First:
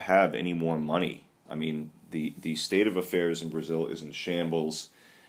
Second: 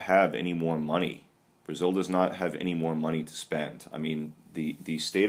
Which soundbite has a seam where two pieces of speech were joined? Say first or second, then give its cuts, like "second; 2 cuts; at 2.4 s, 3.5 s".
first; 1 cut; at 1.5 s